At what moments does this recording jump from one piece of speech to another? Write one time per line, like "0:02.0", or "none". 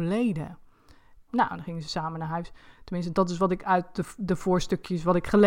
0:01.3